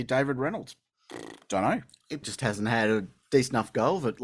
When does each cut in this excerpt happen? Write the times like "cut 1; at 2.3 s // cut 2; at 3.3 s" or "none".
cut 1; at 2.2 s